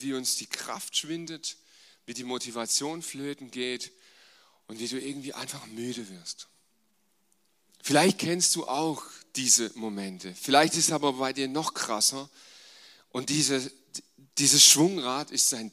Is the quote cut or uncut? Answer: cut